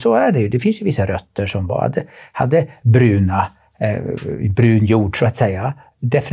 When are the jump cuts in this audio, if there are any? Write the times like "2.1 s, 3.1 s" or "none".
none